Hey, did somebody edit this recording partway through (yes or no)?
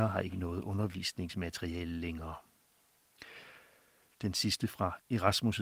yes